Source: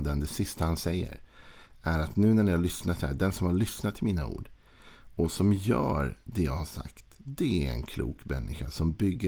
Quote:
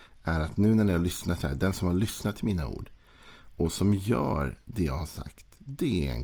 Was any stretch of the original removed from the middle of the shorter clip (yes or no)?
no